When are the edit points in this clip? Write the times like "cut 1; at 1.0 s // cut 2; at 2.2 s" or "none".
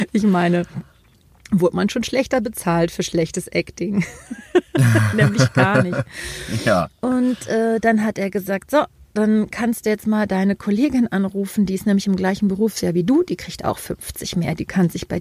none